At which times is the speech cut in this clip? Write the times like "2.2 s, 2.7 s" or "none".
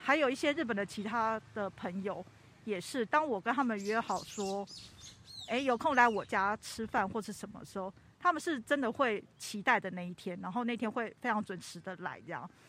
none